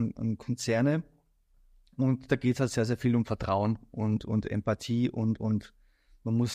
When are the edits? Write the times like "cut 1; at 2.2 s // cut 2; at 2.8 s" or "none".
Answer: cut 1; at 4.2 s

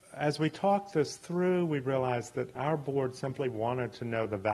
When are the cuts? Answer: cut 1; at 2.6 s

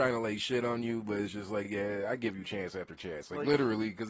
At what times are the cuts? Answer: none

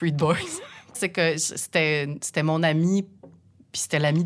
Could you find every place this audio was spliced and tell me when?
cut 1; at 0.9 s

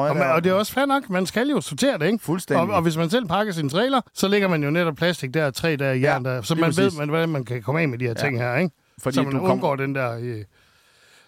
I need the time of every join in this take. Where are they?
cut 1; at 4.1 s

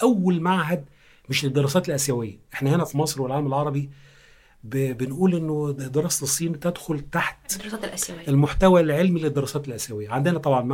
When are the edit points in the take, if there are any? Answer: none

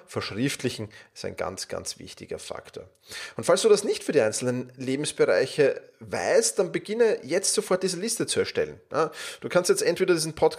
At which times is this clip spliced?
none

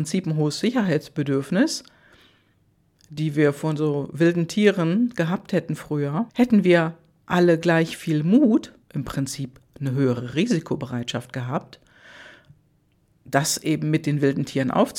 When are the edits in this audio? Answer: cut 1; at 6.3 s // cut 2; at 8.8 s

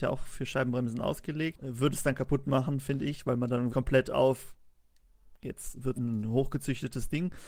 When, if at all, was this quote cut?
cut 1; at 1.5 s // cut 2; at 3.7 s // cut 3; at 5.9 s

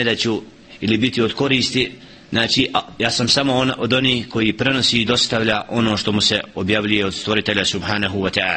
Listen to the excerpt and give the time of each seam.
none

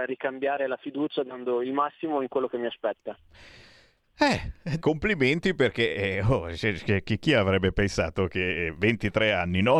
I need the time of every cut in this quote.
cut 1; at 4.8 s

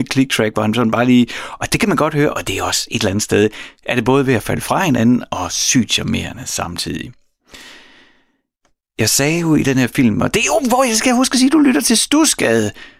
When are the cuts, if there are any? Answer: none

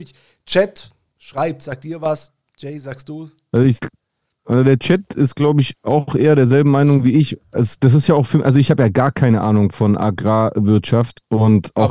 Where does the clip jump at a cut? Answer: none

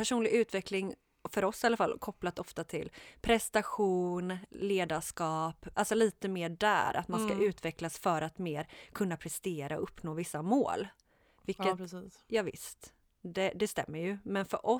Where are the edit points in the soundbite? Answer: cut 1; at 5.7 s

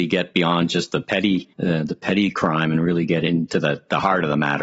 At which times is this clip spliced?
cut 1; at 1.5 s

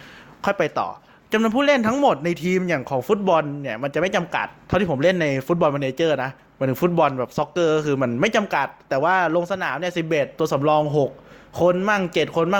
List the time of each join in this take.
none

